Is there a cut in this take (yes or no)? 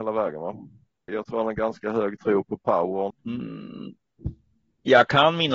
yes